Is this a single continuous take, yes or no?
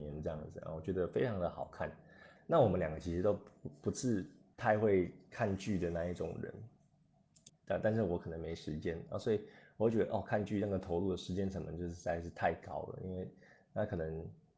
no